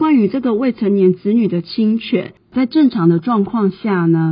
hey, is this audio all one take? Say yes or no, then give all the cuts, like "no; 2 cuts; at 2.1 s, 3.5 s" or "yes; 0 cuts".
yes; 0 cuts